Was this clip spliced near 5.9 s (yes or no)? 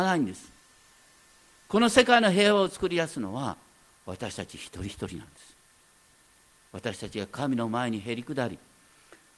no